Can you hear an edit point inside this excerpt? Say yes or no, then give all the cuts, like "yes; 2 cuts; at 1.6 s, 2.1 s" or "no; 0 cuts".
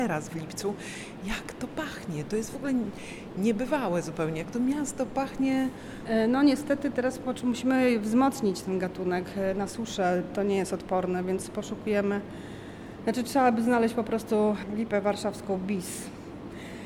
no; 0 cuts